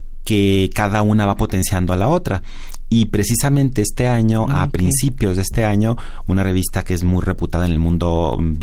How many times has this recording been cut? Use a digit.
0